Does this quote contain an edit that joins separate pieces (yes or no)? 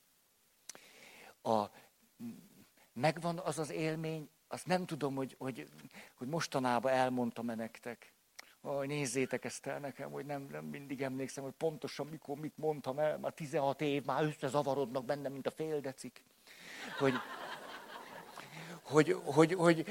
no